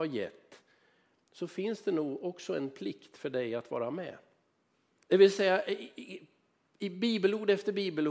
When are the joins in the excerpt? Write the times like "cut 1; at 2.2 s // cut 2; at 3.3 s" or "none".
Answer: cut 1; at 5.0 s